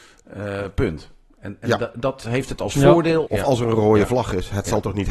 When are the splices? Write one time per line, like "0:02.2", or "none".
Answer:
0:03.3